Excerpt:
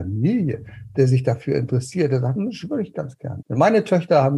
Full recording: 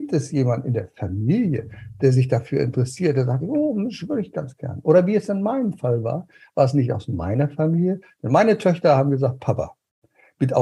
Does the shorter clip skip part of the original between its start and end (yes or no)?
yes